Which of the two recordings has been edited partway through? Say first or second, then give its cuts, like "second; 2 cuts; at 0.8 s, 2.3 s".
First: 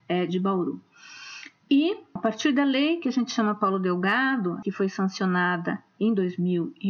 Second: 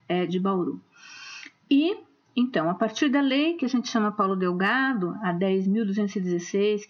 first; 2 cuts; at 2.2 s, 4.6 s